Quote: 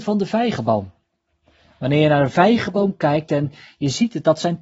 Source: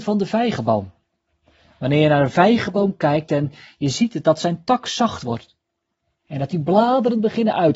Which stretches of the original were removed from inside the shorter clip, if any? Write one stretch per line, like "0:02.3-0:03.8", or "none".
none